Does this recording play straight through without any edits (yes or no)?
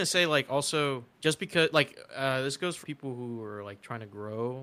no